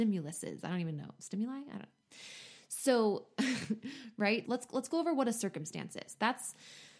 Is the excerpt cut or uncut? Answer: cut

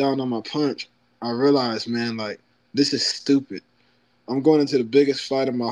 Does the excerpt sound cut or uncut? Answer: uncut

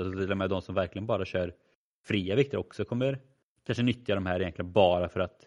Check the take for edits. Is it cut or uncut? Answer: uncut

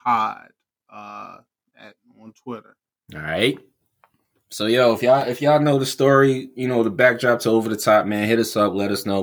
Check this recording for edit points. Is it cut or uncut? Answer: uncut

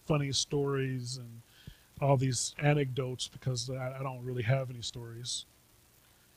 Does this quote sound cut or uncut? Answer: uncut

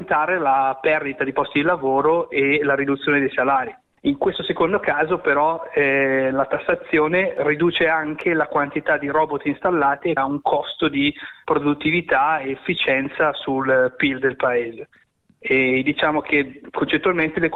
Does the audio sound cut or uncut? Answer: cut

